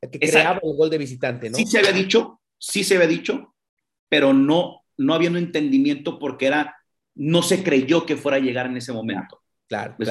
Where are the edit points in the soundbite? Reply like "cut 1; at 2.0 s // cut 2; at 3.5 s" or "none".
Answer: none